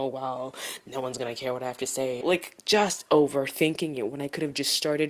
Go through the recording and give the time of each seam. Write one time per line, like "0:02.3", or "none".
0:02.2

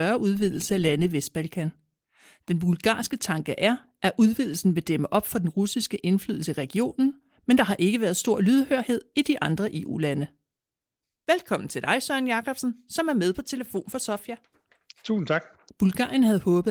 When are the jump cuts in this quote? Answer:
0:15.7

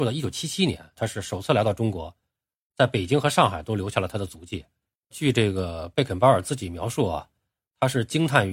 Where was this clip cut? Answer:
0:01.0
0:05.1

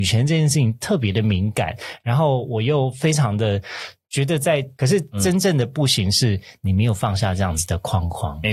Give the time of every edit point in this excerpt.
0:04.8

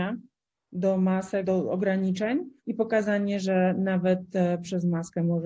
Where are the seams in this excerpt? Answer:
0:01.4
0:02.6

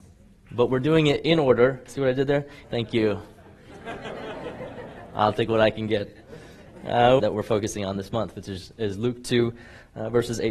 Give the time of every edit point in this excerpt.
0:02.6
0:07.2

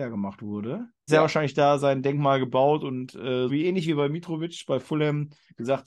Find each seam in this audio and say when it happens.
0:01.1
0:03.5

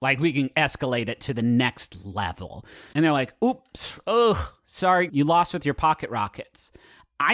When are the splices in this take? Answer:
0:02.9
0:05.1

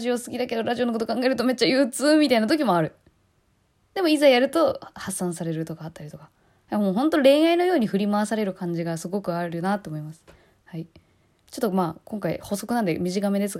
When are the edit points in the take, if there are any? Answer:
none

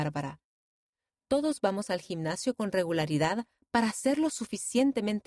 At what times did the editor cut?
none

